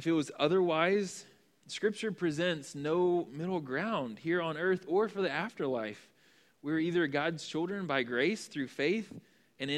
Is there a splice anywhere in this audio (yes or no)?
no